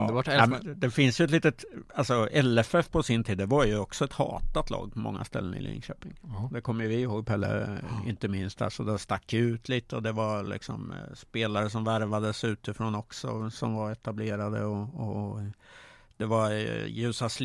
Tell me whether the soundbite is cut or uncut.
uncut